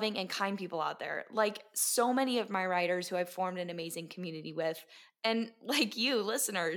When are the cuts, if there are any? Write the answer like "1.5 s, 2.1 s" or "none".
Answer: none